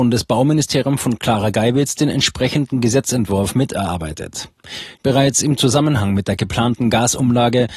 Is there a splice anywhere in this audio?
yes; 1 cut; at 5.0 s

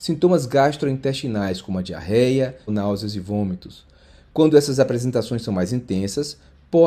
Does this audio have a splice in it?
yes; 1 cut; at 2.7 s

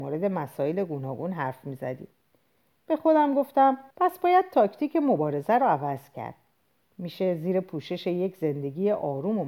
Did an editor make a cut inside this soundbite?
yes; 1 cut; at 3.9 s

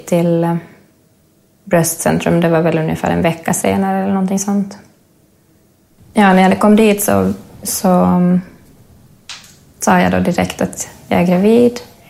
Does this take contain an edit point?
yes; 1 cut; at 5.9 s

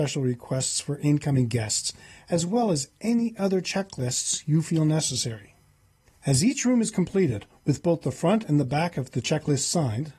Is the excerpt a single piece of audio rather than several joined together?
yes; 0 cuts

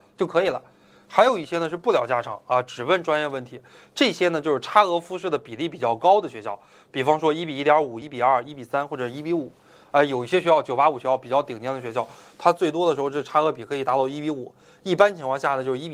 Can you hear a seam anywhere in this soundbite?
no; 0 cuts

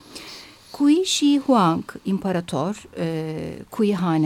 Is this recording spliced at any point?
no; 0 cuts

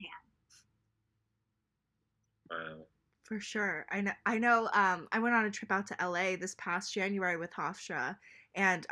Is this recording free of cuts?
yes; 0 cuts

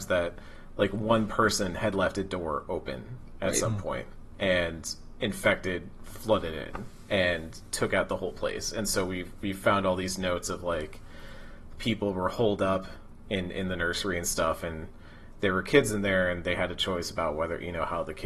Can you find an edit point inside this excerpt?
no; 0 cuts

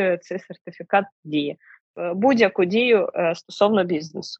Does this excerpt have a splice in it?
yes; 1 cut; at 1.8 s

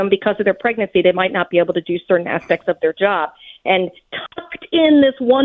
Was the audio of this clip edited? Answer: no; 0 cuts

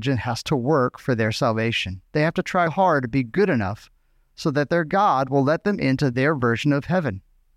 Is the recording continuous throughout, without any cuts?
no; 1 cut; at 2.7 s

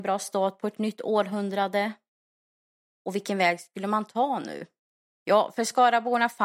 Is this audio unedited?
yes; 0 cuts

